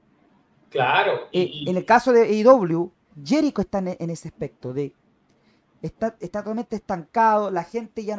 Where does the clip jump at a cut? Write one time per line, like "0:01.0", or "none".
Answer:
none